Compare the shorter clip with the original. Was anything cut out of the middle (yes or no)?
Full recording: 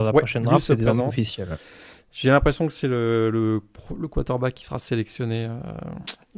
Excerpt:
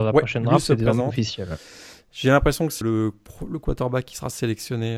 yes